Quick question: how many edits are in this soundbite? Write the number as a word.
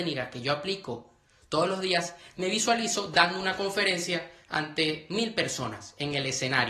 zero